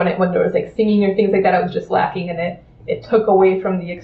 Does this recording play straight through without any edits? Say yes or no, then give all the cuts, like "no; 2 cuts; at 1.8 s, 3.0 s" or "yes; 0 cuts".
yes; 0 cuts